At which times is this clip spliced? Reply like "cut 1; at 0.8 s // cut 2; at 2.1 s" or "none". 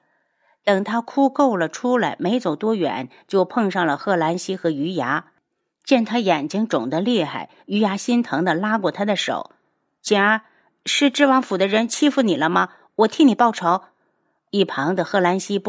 none